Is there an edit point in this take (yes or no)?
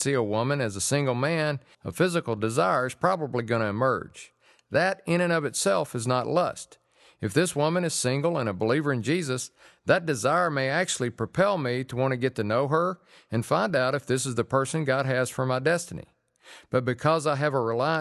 yes